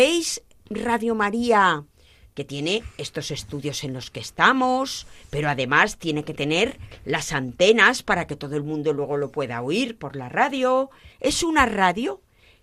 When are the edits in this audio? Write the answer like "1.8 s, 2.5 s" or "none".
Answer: 11.1 s